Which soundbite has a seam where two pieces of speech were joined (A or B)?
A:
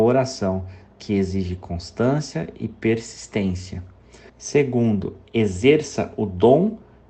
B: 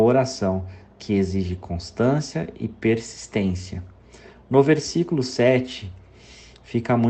A